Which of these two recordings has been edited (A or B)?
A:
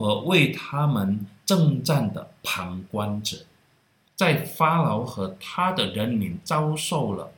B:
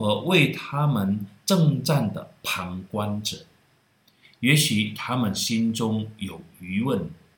A